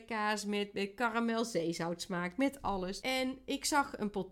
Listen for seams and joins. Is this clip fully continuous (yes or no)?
no